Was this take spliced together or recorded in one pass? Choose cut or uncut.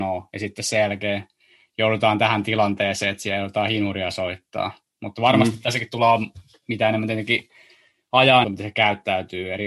cut